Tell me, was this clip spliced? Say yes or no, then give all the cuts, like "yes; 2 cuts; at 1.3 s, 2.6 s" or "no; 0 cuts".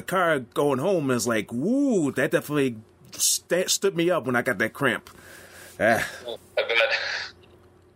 yes; 1 cut; at 6.4 s